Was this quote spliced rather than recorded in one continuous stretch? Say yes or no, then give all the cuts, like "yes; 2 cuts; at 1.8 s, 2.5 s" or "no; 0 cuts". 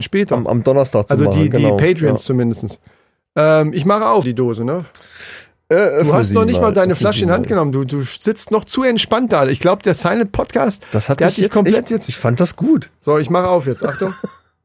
yes; 1 cut; at 4.2 s